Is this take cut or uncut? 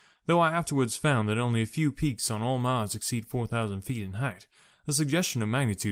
uncut